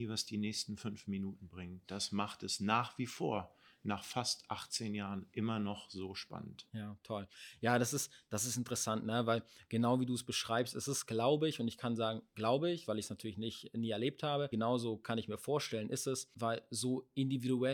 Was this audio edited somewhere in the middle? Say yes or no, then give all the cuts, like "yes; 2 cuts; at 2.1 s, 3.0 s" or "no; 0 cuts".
no; 0 cuts